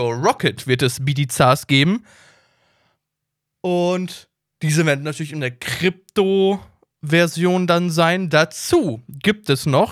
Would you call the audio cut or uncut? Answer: uncut